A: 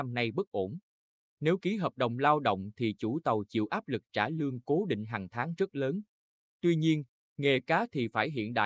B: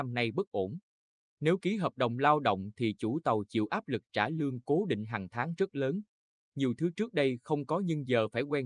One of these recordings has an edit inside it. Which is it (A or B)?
B